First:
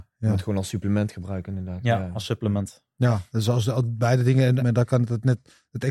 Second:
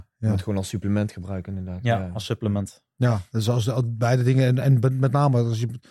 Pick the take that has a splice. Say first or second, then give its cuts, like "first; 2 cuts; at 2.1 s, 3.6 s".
first; 1 cut; at 4.6 s